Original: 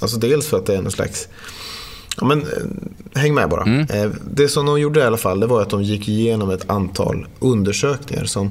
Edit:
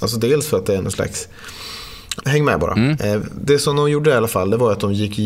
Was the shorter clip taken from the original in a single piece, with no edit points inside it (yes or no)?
no